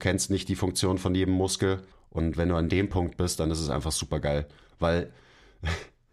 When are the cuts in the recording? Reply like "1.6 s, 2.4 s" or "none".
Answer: 1.9 s